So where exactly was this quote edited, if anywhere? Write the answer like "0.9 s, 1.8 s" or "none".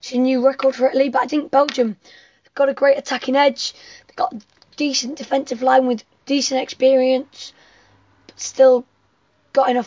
1.3 s